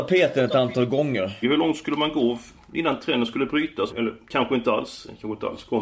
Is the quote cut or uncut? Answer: cut